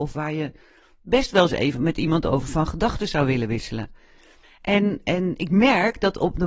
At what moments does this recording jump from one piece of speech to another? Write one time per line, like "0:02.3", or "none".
0:04.4